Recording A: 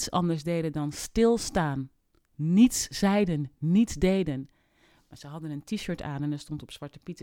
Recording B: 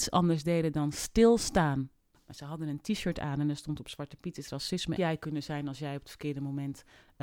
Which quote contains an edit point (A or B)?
B